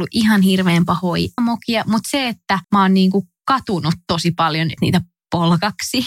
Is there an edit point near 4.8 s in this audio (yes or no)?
yes